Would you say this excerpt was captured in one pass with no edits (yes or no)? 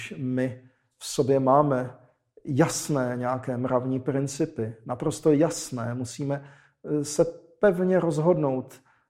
yes